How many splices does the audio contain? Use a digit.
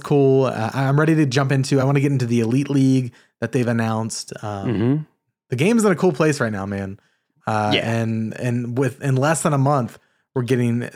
0